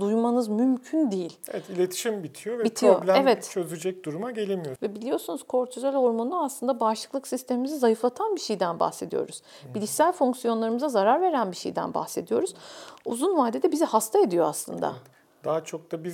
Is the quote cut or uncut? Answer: cut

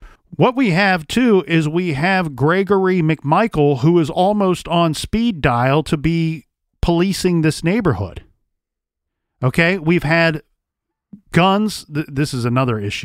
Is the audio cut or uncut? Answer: uncut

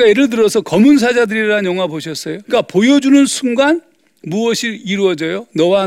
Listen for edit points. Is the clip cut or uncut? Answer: cut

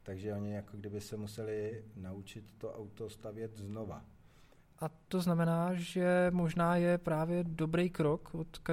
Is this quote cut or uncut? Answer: cut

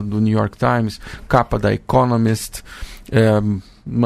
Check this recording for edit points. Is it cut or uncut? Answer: uncut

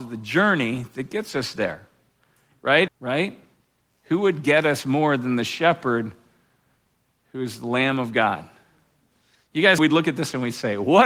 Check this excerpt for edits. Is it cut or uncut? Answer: cut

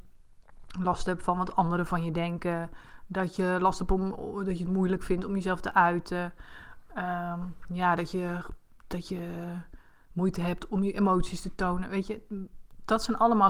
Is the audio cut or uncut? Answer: uncut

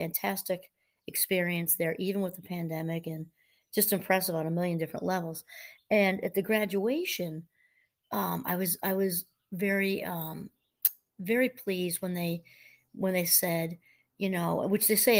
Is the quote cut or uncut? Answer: uncut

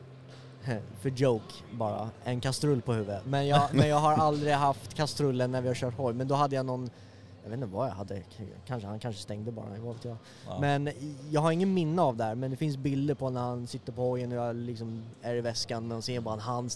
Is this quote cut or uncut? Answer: uncut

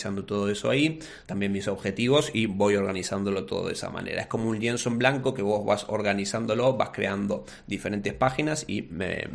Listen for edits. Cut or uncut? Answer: cut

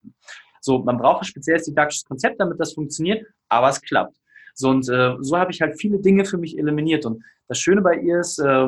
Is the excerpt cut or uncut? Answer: uncut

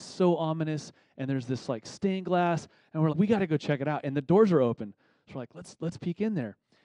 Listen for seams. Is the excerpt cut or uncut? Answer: cut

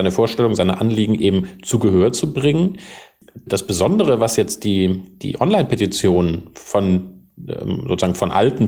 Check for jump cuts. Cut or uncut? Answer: uncut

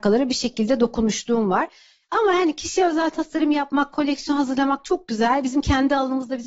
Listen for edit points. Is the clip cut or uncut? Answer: uncut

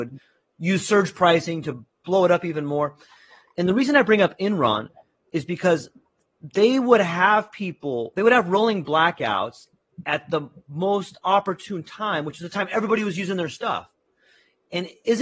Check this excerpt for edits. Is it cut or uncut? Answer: uncut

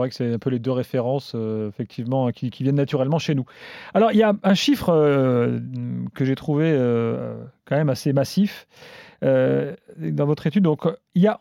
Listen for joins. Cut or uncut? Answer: uncut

